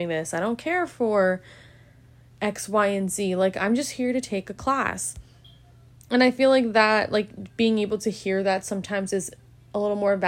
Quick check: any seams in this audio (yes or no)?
no